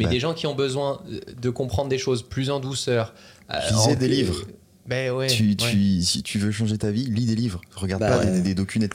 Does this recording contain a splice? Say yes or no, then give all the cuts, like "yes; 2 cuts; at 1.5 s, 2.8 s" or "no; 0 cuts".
no; 0 cuts